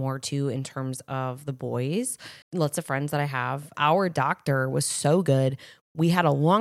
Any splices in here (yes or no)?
yes